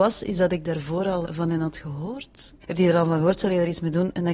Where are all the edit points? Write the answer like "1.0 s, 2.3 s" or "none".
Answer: 1.2 s, 2.6 s